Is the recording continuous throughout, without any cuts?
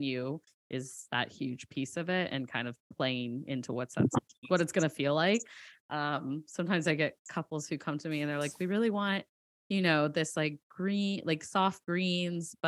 yes; 0 cuts

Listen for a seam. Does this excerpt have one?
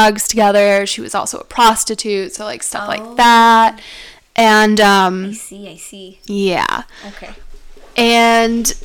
no; 0 cuts

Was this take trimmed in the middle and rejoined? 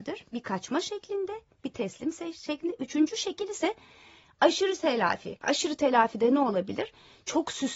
yes; 1 cut; at 5.4 s

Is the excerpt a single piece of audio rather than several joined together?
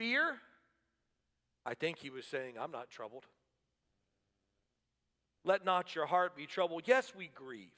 no; 2 cuts; at 1.5 s, 5.4 s

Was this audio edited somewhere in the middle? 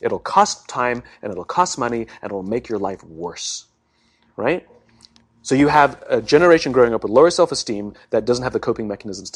no; 0 cuts

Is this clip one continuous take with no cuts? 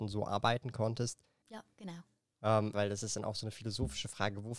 no; 2 cuts; at 1.4 s, 2.7 s

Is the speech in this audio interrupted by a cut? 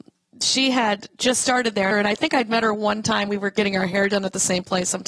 yes; 1 cut; at 1.9 s

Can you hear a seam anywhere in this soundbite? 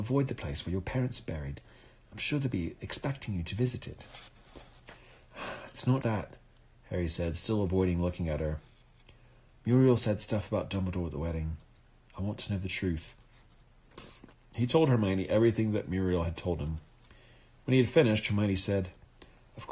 yes; 1 cut; at 6.0 s

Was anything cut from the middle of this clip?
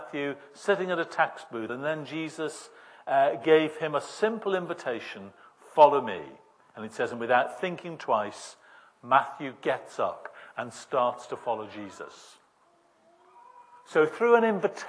no; 0 cuts

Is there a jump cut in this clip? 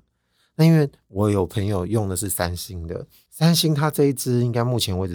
no; 0 cuts

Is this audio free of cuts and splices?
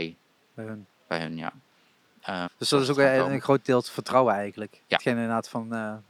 no; 1 cut; at 2.5 s

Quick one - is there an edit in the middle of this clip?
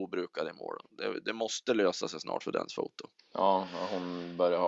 no; 0 cuts

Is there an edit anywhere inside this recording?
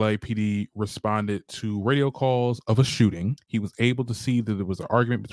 yes; 1 cut; at 3.4 s

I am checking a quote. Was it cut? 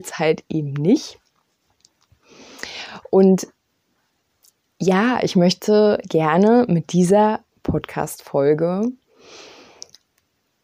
no; 0 cuts

